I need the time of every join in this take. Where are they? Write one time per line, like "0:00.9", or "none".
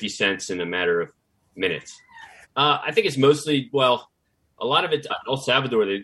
0:02.4
0:05.1